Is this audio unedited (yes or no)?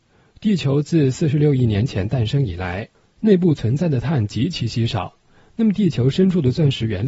yes